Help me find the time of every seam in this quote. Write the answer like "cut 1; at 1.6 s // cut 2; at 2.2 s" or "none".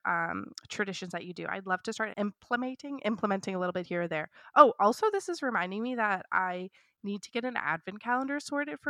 cut 1; at 2.1 s